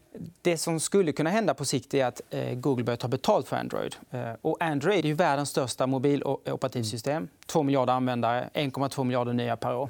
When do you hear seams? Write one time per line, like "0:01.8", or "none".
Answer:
0:05.0

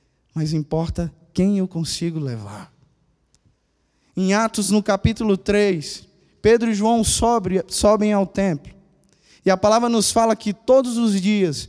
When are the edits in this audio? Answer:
none

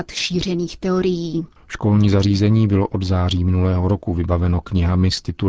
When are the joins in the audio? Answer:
0:01.6

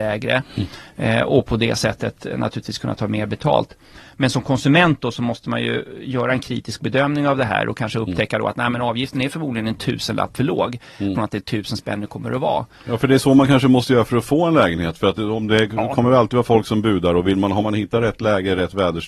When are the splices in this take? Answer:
0:11.1

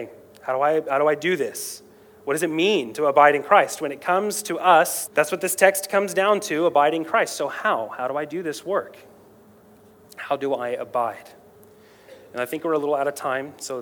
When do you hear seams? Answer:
0:05.1

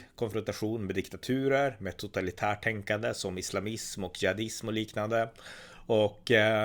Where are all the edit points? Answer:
none

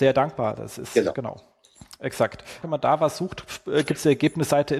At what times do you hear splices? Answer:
0:02.6

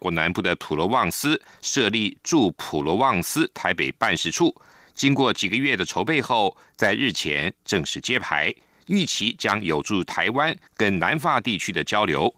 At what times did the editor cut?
none

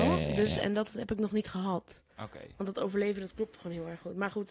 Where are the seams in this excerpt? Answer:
none

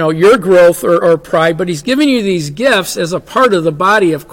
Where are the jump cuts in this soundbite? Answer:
0:01.0

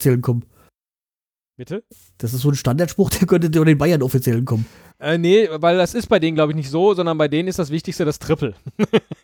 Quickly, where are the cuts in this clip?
none

